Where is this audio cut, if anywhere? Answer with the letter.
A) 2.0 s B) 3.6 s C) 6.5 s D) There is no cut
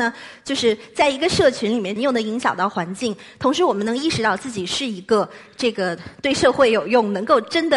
A